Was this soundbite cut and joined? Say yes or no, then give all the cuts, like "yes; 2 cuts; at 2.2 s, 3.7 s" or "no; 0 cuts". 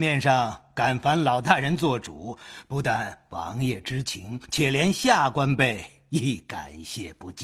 no; 0 cuts